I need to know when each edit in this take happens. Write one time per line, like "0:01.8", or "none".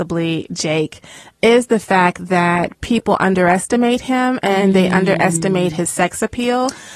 none